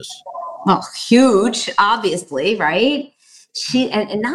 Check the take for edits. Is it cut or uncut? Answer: uncut